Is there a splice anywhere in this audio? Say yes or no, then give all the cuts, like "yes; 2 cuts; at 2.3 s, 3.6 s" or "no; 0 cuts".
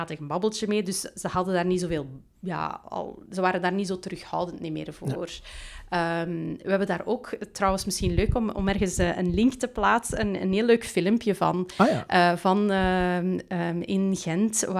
no; 0 cuts